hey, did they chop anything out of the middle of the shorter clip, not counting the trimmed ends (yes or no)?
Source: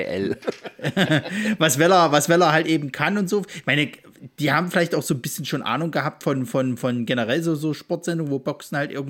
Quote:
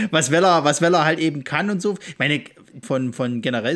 yes